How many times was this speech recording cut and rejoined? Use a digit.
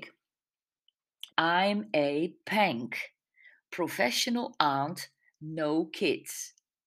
1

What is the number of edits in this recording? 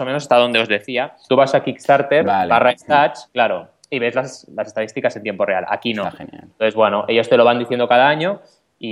1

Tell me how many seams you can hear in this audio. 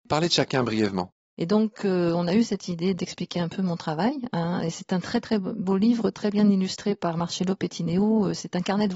1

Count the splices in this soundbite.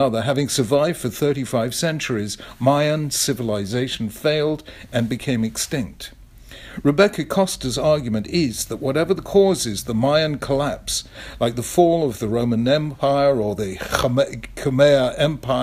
0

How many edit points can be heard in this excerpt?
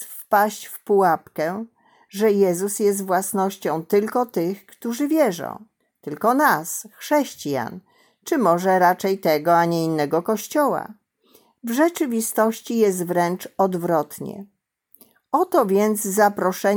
0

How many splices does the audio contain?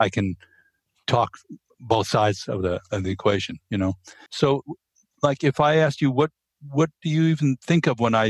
1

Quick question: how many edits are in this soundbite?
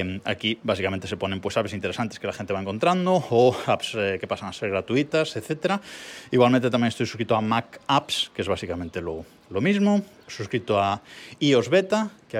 0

